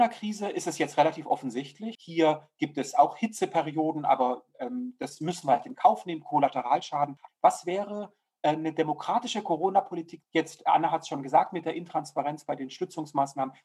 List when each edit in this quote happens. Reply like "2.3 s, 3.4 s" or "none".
1.9 s, 7.3 s, 10.2 s

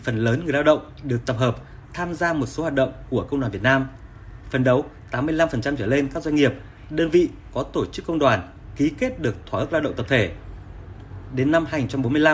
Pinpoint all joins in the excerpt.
none

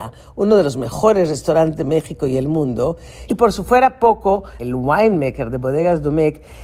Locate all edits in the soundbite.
3.3 s, 4.6 s

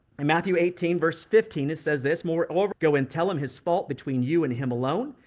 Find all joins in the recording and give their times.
2.7 s

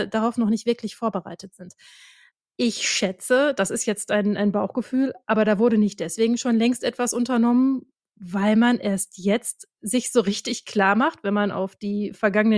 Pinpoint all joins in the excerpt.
none

